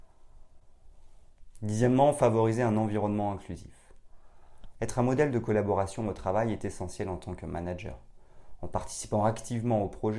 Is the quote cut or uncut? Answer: cut